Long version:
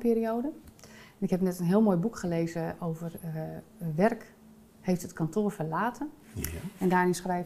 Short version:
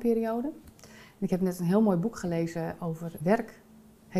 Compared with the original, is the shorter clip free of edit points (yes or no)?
no